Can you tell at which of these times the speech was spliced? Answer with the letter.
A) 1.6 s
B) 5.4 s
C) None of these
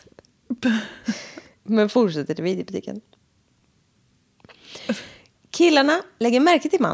A